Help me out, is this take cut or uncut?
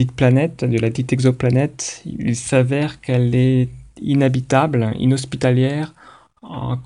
uncut